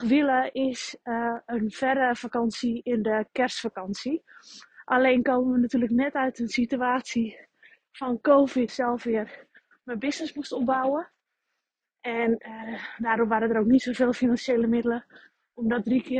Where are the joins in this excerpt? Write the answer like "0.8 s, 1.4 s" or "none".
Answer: 8.7 s